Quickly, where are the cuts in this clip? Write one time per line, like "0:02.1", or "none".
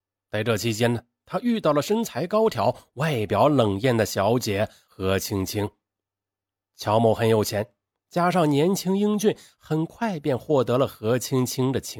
none